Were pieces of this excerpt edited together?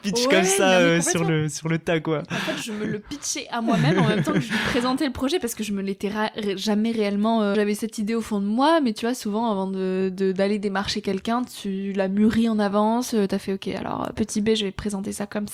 yes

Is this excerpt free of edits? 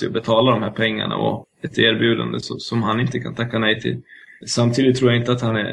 no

